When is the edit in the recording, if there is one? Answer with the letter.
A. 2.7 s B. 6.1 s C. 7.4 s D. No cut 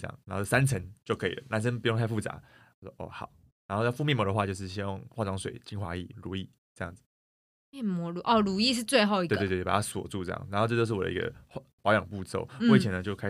B